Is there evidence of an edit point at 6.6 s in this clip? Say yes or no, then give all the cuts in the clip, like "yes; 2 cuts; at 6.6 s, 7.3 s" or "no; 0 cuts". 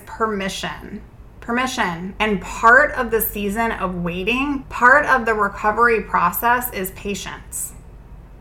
no; 2 cuts; at 2.2 s, 4.6 s